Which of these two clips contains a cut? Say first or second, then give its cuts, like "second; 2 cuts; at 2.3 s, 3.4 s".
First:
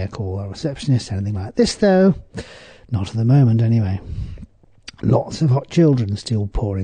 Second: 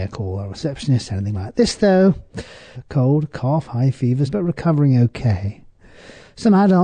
second; 2 cuts; at 2.7 s, 4.3 s